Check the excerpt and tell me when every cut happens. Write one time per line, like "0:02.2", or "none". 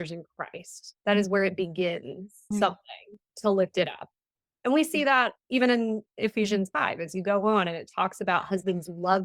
0:02.5

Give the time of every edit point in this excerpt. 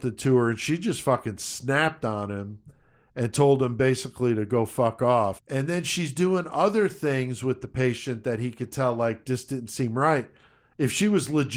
0:05.4

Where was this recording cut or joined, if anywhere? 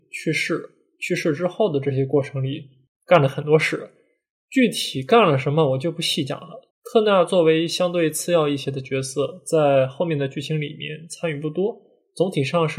0:06.7

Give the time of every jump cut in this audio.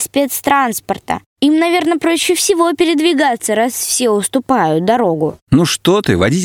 none

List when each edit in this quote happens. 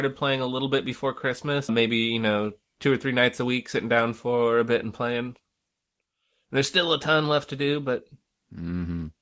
0:01.7

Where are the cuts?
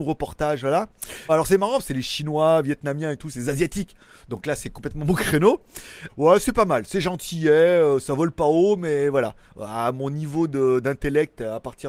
0:01.3
0:06.1

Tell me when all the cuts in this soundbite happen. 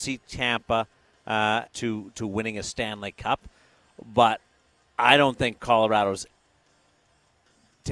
0:01.7

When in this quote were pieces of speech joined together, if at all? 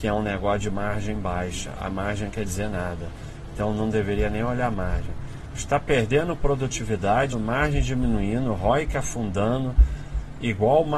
0:07.3

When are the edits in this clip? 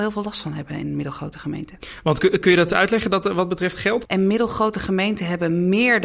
0:04.0

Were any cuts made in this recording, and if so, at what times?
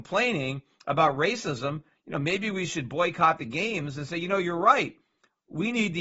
none

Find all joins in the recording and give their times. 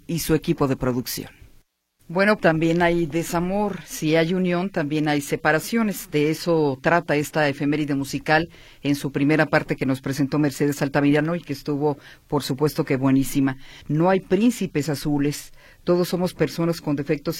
0:02.4
0:13.8

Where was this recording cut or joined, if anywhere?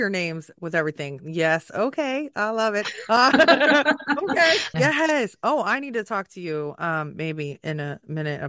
0:04.7

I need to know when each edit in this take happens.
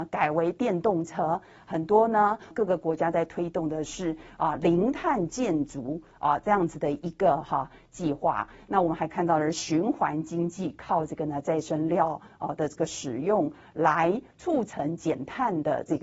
0:02.5

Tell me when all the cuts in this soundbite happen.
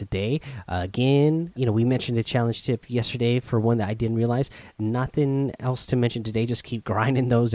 0:01.6

